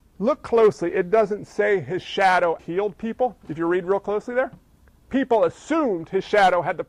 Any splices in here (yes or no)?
yes